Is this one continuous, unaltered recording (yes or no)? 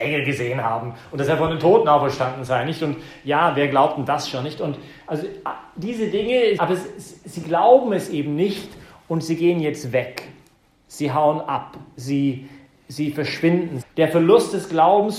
no